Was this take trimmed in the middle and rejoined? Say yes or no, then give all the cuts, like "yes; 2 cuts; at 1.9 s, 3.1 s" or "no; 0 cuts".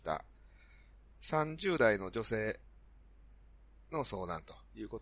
yes; 1 cut; at 1.1 s